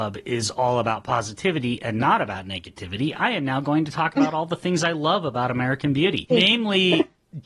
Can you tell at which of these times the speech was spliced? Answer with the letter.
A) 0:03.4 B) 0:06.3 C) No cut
B